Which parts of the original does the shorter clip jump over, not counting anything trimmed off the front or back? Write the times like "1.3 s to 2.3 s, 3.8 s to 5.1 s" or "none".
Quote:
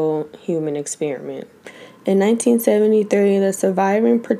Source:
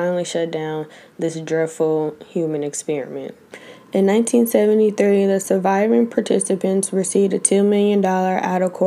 none